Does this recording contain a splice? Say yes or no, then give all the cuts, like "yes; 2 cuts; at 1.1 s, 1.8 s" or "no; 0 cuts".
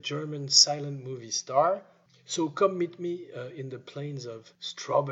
no; 0 cuts